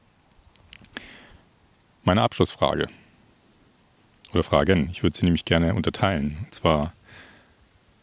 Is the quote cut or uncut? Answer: uncut